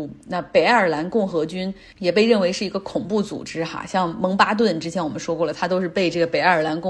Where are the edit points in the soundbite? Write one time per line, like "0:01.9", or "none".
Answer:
none